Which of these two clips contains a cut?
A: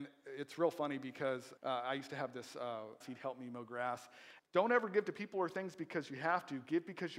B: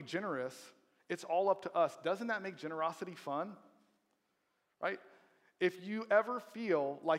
A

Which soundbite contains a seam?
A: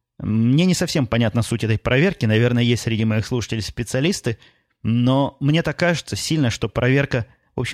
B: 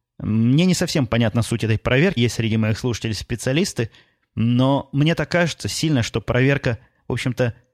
B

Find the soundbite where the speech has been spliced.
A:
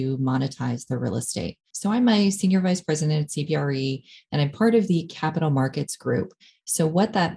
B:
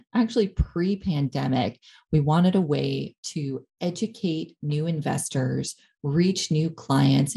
A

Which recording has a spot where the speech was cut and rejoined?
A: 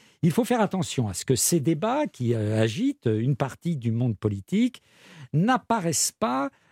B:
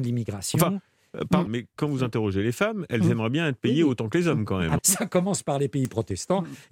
B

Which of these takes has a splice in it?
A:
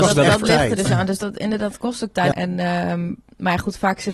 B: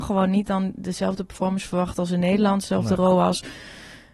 A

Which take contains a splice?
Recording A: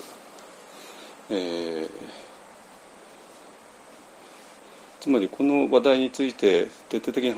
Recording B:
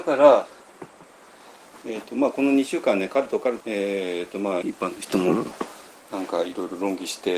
B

